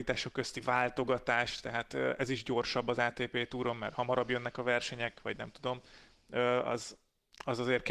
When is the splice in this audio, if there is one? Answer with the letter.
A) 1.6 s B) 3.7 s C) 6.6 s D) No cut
D